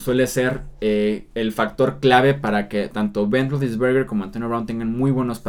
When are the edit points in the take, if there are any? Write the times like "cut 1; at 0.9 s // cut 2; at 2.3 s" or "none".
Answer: cut 1; at 1.3 s